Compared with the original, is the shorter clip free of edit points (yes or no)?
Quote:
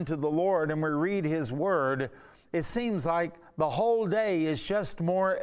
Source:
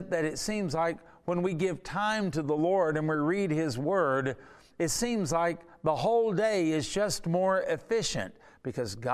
yes